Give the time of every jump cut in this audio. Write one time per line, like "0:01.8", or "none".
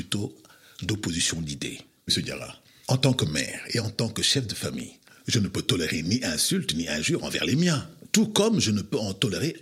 0:02.1